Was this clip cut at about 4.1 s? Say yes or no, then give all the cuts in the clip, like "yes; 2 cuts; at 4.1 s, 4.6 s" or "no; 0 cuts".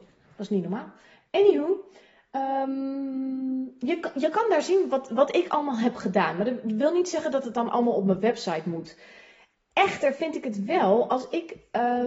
no; 0 cuts